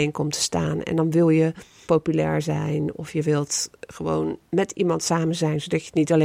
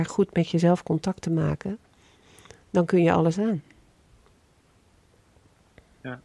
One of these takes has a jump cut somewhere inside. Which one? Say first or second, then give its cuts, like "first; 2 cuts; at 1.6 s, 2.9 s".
first; 2 cuts; at 1.8 s, 4.5 s